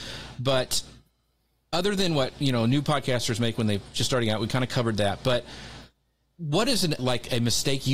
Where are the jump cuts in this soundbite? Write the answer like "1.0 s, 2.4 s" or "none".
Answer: 7.0 s

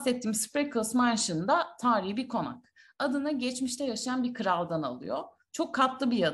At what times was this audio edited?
none

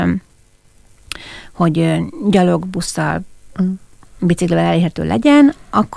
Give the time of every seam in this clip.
none

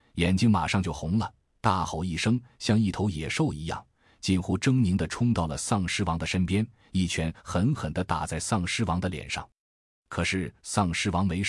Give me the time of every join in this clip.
none

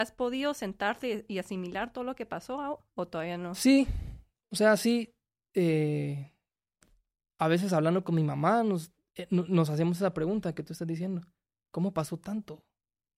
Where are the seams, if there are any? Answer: none

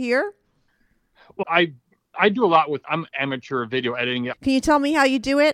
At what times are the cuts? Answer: 1.4 s, 2.8 s, 4.3 s

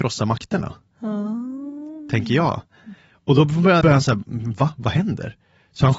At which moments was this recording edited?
3.8 s

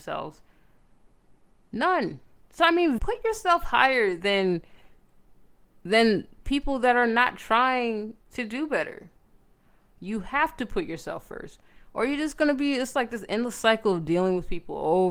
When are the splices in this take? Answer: 3.0 s, 10.0 s

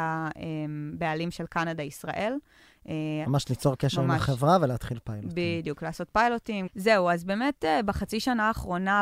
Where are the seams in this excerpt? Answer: 3.2 s, 6.7 s

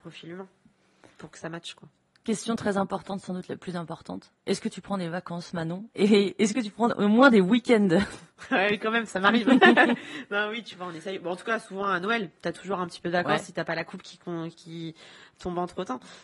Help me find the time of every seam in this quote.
none

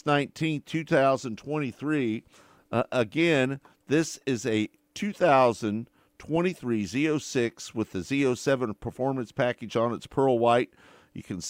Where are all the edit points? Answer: none

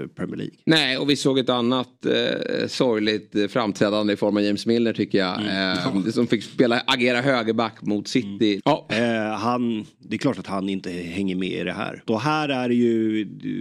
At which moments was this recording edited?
8.6 s, 12.1 s

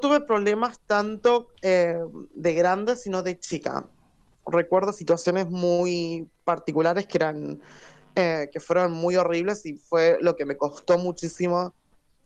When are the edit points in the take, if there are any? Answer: none

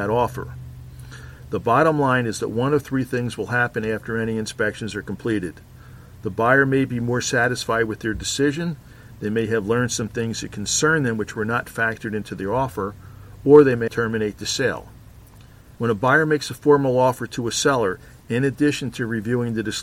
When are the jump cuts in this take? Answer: 13.9 s, 15.7 s

